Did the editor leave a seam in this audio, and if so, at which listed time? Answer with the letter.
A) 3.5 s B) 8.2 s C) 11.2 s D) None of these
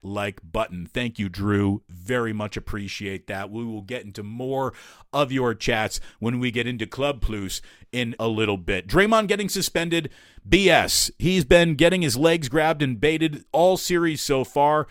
B